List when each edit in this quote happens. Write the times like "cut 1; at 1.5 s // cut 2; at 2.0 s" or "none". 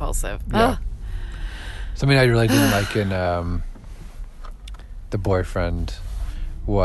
none